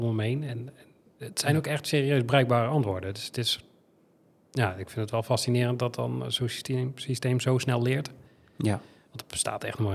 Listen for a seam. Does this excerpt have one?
no; 0 cuts

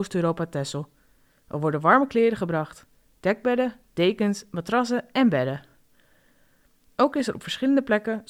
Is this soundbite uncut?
yes; 0 cuts

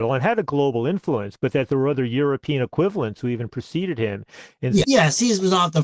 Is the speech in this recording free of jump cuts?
no; 1 cut; at 4.8 s

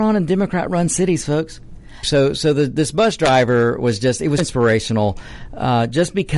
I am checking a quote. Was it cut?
yes; 2 cuts; at 2.0 s, 4.4 s

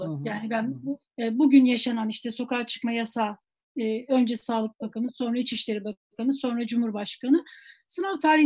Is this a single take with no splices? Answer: no; 1 cut; at 1.0 s

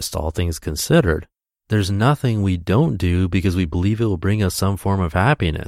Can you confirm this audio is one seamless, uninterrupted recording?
yes; 0 cuts

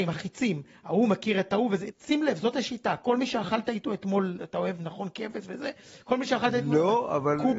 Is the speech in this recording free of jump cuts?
no; 1 cut; at 1.9 s

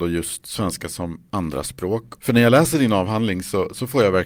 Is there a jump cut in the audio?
yes; 1 cut; at 2.2 s

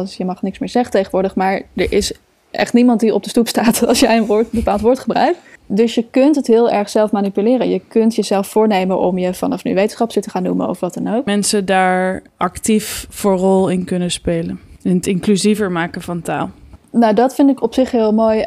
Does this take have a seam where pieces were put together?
yes; 1 cut; at 11.3 s

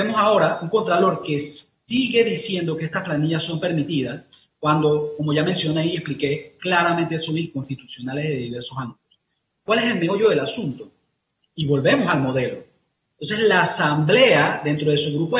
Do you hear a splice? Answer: yes; 1 cut; at 13.1 s

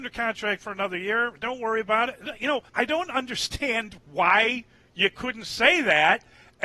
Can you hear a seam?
yes; 1 cut; at 2.7 s

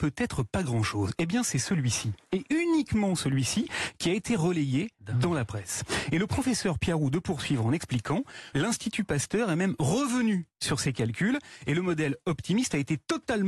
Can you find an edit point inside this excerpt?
yes; 1 cut; at 8.5 s

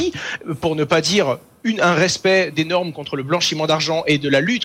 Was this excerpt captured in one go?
no; 1 cut; at 2.5 s

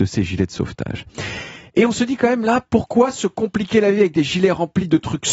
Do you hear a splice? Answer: no; 0 cuts

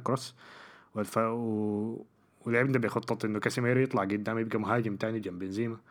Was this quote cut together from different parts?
no; 0 cuts

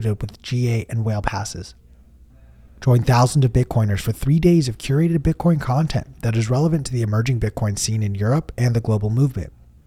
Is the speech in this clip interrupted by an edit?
yes; 1 cut; at 2.7 s

